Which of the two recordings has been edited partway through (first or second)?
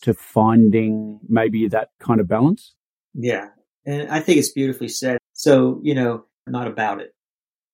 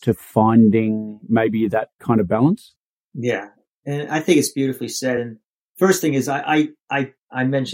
first